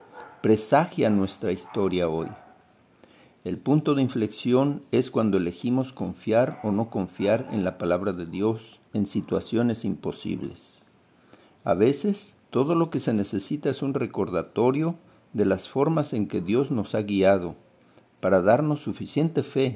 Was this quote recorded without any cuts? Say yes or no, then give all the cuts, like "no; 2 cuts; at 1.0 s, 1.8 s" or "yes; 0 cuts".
no; 1 cut; at 12.4 s